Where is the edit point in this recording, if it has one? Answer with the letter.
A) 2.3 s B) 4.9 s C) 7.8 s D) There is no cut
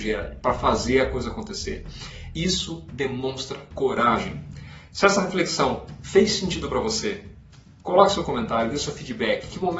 A